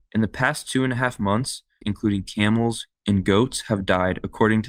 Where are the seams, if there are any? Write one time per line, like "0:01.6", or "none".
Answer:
0:01.8